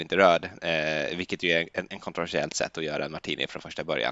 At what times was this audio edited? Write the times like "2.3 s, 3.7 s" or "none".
none